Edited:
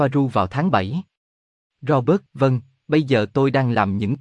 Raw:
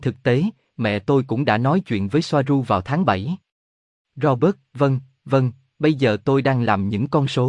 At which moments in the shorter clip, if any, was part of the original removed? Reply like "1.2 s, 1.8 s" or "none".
2.3 s